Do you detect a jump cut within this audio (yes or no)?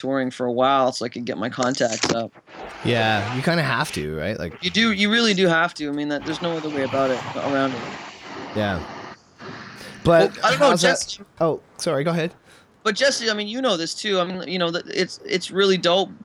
no